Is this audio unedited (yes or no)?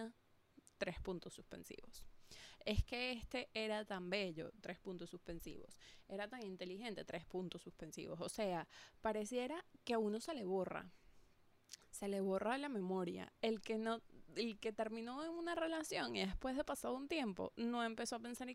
no